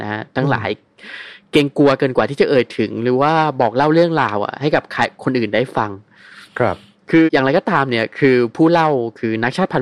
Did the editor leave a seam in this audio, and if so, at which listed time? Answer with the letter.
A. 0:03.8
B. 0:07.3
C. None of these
B